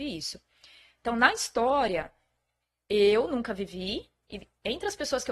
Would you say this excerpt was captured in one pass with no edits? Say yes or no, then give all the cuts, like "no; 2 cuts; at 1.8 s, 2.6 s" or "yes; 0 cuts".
yes; 0 cuts